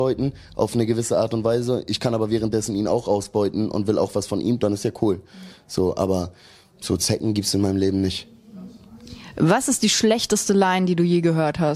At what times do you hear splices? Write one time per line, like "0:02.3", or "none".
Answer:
none